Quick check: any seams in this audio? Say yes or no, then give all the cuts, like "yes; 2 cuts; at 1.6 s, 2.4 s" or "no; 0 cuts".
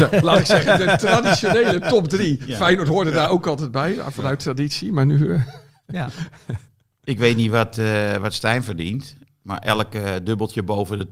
no; 0 cuts